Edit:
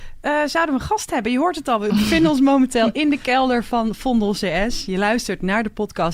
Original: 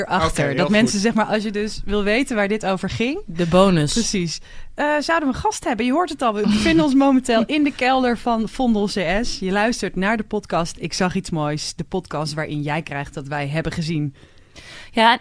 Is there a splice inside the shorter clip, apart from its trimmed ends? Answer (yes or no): no